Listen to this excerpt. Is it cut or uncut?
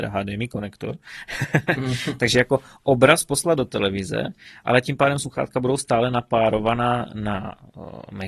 uncut